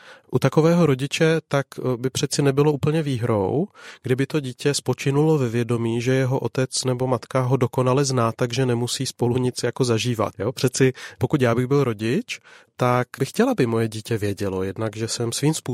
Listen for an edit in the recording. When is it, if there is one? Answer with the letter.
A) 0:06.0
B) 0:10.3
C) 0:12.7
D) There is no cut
B